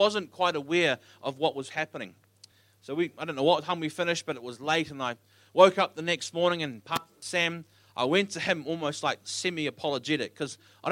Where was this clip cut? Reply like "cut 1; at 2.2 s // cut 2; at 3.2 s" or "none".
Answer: none